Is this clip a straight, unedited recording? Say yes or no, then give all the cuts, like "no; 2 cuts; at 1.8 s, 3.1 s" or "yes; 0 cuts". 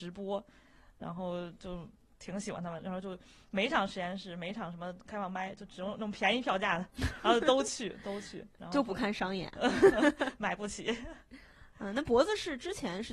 no; 1 cut; at 2.8 s